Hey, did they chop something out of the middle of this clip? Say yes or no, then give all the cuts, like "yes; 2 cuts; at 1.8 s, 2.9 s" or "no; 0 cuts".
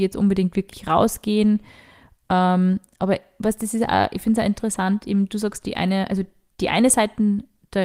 no; 0 cuts